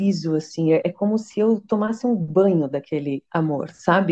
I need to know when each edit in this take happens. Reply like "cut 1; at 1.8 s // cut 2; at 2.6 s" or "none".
none